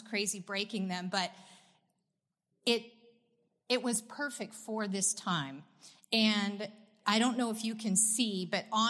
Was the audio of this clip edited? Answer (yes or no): no